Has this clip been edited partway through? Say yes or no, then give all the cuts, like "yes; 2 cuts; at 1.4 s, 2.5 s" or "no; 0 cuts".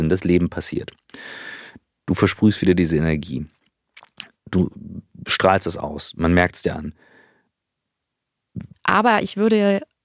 yes; 1 cut; at 8.7 s